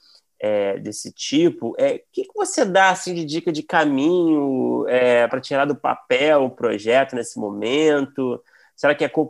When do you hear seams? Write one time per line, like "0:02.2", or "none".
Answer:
0:05.3

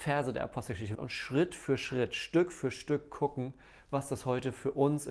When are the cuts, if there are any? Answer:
0:00.9

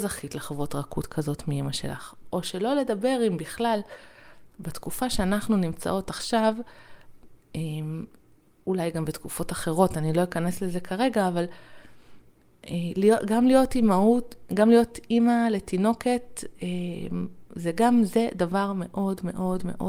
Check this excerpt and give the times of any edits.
none

